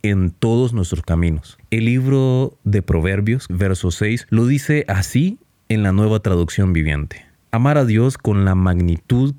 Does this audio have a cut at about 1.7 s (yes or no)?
no